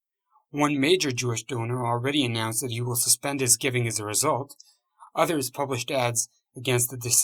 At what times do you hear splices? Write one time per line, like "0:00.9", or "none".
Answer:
none

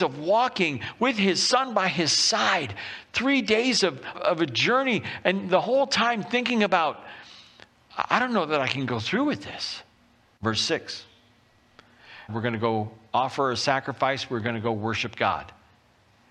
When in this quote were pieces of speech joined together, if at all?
0:04.1
0:10.4
0:12.3

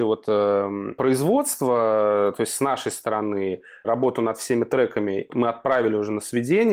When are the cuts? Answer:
0:05.3

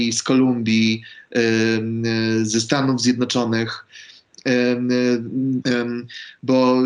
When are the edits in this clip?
0:05.6

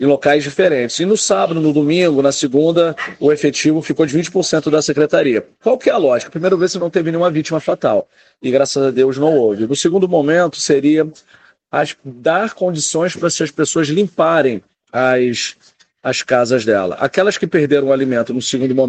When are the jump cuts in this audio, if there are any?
none

